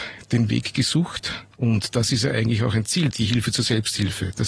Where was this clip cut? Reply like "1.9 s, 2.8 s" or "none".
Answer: 1.5 s, 3.1 s

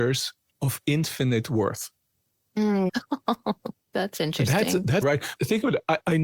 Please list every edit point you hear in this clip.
2.9 s, 5.0 s

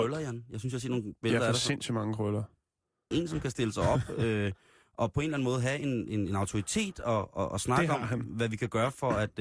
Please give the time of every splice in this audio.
3.1 s

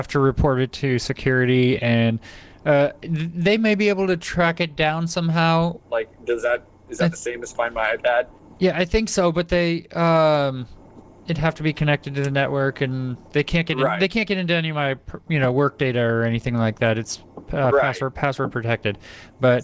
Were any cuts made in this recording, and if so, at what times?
5.8 s

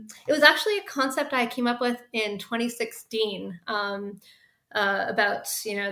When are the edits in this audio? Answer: none

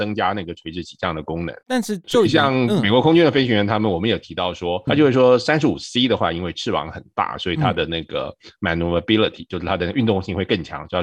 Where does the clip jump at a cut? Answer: 1.6 s, 4.9 s

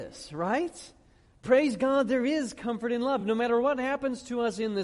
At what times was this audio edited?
none

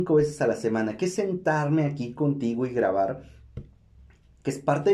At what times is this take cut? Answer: none

